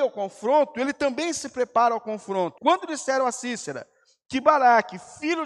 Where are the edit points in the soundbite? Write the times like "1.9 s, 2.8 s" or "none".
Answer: 2.6 s